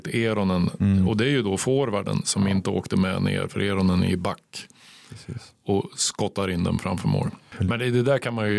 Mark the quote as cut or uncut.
uncut